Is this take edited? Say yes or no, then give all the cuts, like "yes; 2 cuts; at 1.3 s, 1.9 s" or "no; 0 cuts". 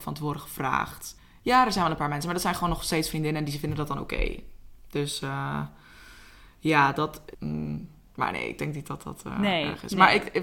yes; 1 cut; at 7.3 s